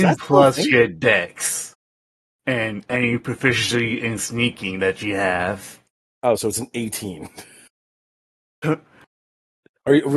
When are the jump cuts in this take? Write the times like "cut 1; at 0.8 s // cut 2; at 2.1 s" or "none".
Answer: cut 1; at 8.6 s